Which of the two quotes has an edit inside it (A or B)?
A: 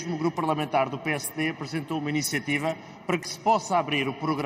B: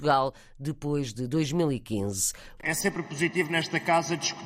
B